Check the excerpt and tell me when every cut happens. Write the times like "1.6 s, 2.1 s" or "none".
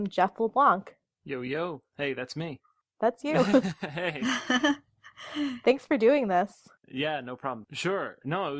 7.6 s